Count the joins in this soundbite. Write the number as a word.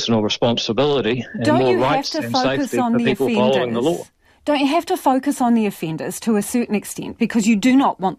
zero